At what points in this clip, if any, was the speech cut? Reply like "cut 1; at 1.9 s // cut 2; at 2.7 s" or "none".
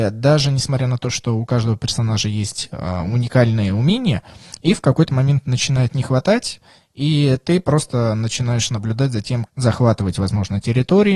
cut 1; at 9.4 s